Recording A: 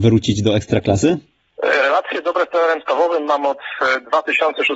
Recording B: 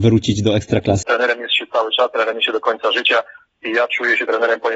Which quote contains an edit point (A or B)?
B